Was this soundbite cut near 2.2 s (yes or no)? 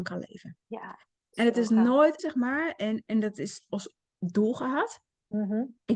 yes